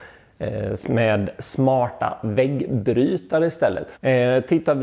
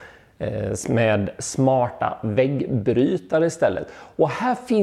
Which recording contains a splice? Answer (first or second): first